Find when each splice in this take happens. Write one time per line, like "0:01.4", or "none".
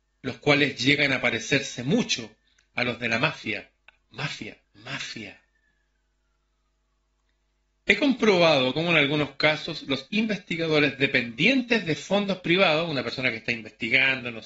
0:04.6